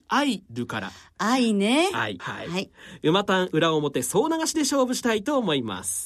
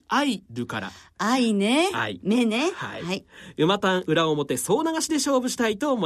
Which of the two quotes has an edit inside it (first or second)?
first